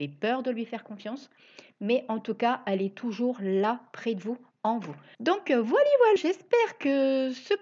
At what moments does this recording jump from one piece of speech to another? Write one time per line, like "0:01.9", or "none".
0:05.1
0:06.2